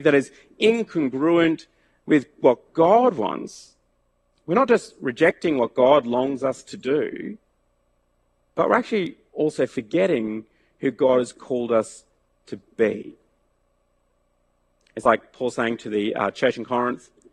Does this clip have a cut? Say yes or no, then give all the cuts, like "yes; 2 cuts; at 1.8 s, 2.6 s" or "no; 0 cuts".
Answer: no; 0 cuts